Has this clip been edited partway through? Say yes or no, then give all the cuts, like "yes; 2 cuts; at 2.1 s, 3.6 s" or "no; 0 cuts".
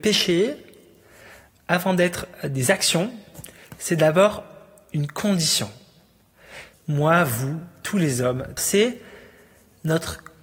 yes; 2 cuts; at 6.7 s, 8.6 s